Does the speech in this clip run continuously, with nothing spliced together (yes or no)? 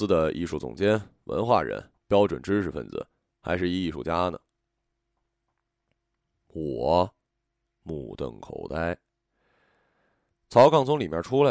yes